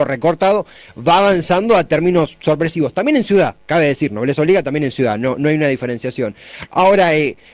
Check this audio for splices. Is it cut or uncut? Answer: uncut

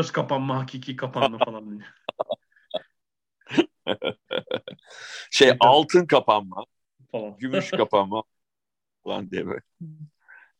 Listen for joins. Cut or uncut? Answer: uncut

